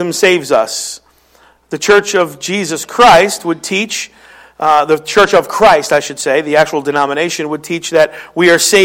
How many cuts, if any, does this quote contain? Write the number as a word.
zero